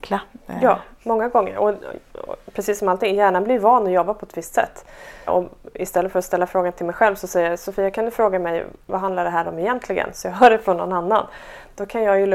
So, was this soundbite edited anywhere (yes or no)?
yes